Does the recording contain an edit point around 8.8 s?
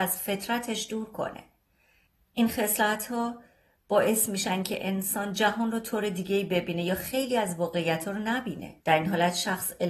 yes; 1 cut; at 8.8 s

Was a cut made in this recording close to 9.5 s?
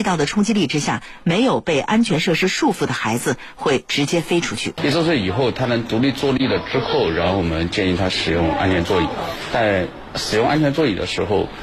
no; 1 cut; at 4.8 s

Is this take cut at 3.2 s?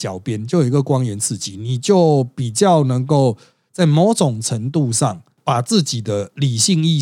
no; 0 cuts

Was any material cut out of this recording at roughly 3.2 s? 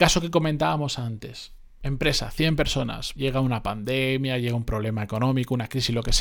yes; 1 cut; at 3.2 s

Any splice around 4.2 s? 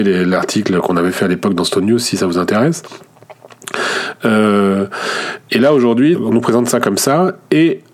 no; 1 cut; at 6.1 s

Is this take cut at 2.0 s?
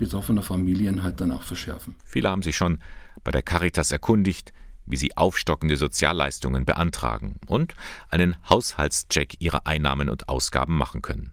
yes; 1 cut; at 2.0 s

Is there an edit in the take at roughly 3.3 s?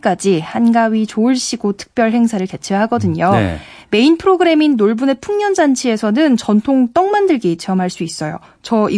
no; 0 cuts

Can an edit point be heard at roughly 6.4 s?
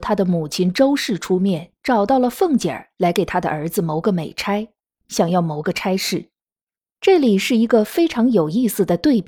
no; 1 cut; at 5.1 s

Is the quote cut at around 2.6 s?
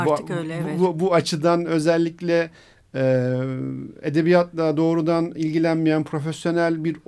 no; 0 cuts

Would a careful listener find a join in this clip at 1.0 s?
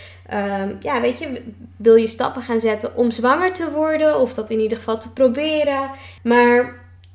no; 1 cut; at 6.2 s

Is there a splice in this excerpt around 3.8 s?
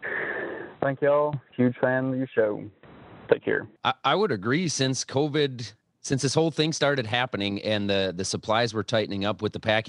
yes; 1 cut; at 3.8 s

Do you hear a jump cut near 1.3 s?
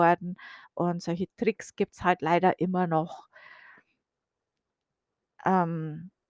yes; 1 cut; at 1.3 s

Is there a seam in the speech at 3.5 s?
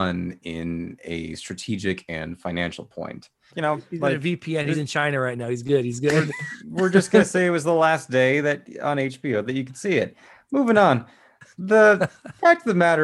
yes; 1 cut; at 3.5 s

